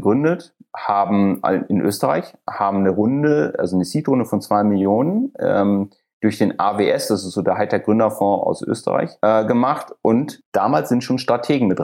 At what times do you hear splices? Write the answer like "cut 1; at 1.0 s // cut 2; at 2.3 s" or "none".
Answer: none